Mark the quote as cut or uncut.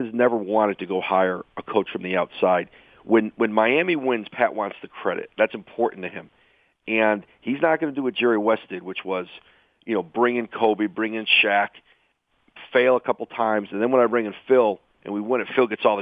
uncut